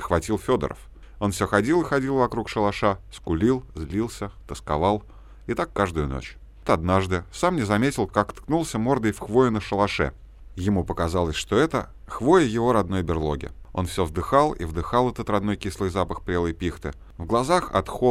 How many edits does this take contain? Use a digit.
1